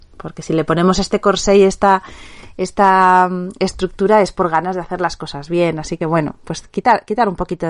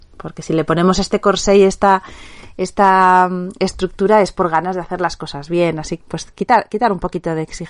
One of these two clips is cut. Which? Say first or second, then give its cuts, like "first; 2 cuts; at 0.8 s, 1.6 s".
second; 1 cut; at 6.0 s